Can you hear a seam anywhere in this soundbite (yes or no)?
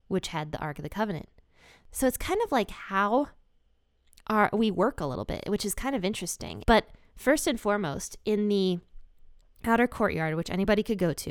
yes